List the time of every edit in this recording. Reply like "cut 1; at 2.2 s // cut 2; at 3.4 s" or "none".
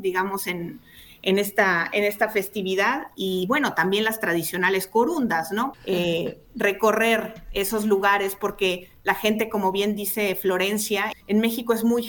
cut 1; at 5.7 s // cut 2; at 11.1 s